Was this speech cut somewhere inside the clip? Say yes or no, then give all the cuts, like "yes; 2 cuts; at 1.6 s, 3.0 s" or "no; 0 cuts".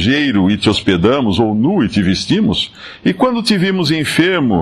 no; 0 cuts